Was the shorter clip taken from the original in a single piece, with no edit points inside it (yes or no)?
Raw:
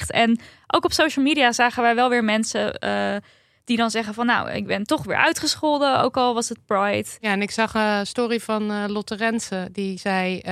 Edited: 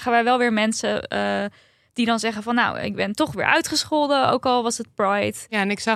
yes